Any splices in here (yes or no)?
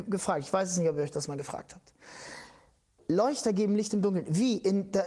no